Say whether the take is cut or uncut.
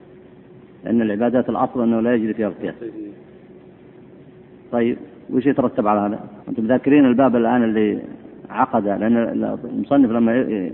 cut